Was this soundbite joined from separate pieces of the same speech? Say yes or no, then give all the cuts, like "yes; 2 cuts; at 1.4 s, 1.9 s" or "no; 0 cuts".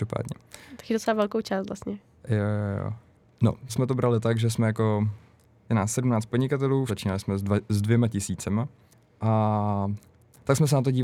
yes; 2 cuts; at 3.7 s, 6.9 s